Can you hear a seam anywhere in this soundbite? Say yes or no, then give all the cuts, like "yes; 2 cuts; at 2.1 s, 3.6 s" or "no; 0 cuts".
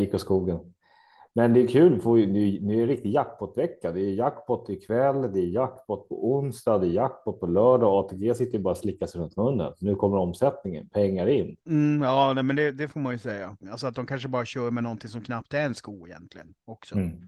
yes; 2 cuts; at 11.6 s, 13.6 s